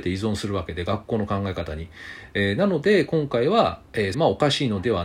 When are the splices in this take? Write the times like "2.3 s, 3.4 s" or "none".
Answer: 4.1 s